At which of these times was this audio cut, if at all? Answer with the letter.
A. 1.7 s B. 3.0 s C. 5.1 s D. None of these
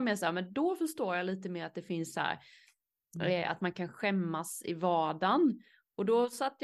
D